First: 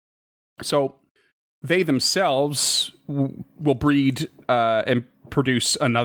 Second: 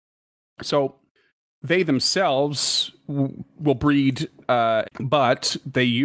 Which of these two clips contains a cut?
second; 1 cut; at 4.8 s

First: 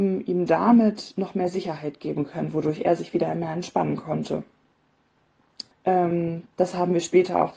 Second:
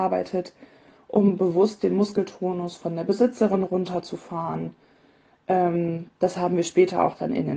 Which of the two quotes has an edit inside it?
first; 1 cut; at 5.7 s

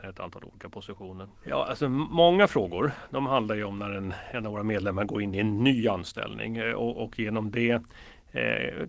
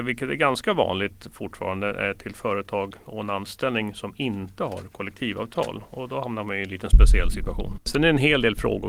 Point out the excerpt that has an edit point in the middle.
first; 1 cut; at 1.3 s

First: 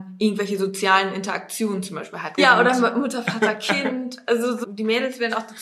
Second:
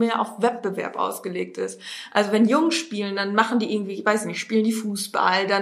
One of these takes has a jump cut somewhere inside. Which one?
first; 2 cuts; at 2.4 s, 4.6 s

